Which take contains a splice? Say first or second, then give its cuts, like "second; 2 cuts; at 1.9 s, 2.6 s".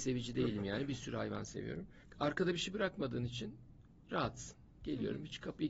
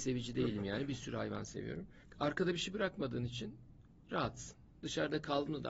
second; 1 cut; at 4.8 s